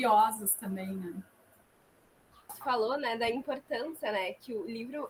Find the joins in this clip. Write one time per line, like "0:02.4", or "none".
0:02.5